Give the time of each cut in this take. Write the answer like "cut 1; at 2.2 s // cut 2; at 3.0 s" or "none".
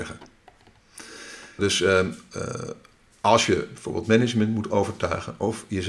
cut 1; at 1.6 s

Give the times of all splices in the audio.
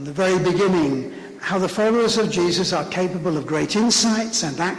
none

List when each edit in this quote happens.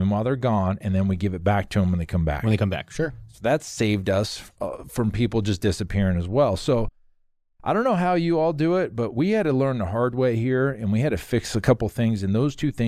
none

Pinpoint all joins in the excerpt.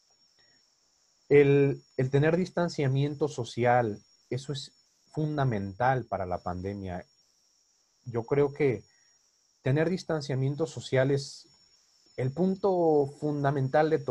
none

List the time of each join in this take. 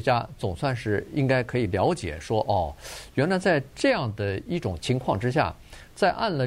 cut 1; at 4.8 s

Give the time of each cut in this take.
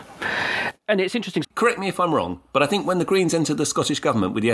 cut 1; at 1.4 s

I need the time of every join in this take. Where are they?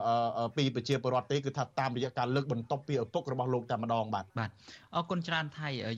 cut 1; at 4.3 s

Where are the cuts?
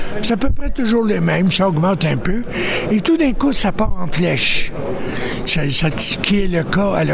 cut 1; at 5.9 s

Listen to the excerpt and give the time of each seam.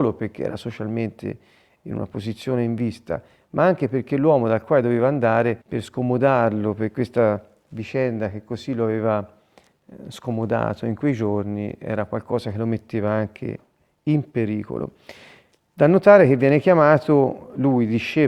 cut 1; at 5.6 s

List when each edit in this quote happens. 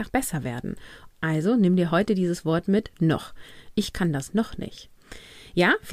cut 1; at 1.1 s

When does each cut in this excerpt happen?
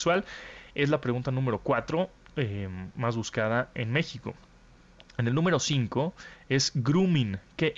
none

